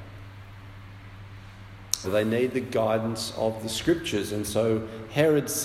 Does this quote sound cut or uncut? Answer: cut